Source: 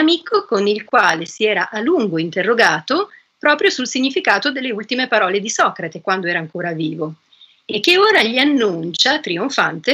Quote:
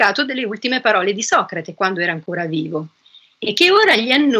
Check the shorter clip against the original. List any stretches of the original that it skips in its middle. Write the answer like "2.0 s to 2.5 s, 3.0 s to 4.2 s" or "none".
none